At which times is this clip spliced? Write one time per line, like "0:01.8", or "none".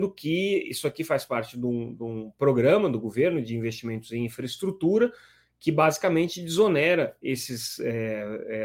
none